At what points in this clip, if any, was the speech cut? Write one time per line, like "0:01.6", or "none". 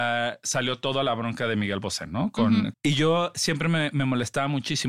0:02.7